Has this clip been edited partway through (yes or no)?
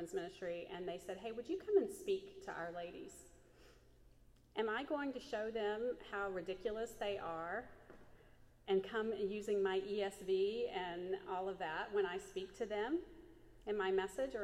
no